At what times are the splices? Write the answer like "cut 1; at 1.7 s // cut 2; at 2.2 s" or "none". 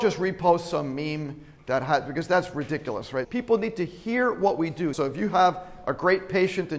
cut 1; at 3.2 s // cut 2; at 4.9 s